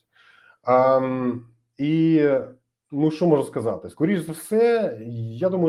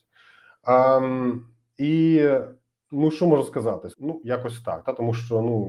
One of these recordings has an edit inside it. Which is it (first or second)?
second